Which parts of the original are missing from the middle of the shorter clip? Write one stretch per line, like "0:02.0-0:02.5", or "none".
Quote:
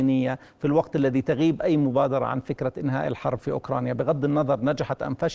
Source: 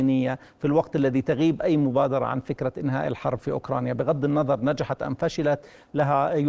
none